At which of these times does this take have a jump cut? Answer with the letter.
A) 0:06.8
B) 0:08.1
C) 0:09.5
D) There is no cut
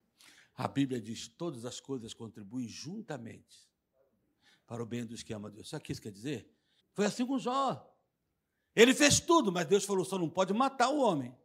A